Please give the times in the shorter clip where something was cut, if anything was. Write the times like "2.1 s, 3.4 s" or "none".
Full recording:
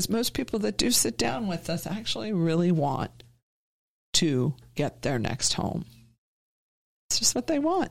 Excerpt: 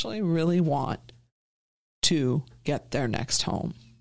none